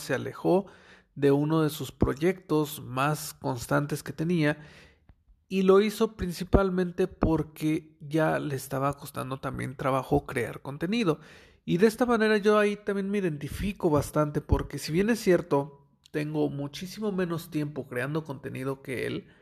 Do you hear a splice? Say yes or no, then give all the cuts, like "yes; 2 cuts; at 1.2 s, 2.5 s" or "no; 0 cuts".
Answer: no; 0 cuts